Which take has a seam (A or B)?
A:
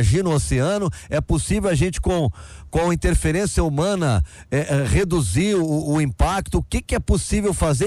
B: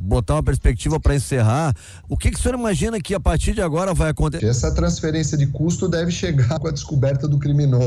B